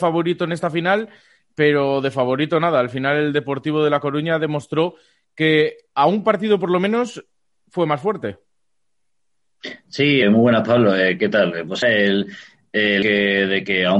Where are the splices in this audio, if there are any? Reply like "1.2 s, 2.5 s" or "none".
10.2 s, 11.8 s, 13.0 s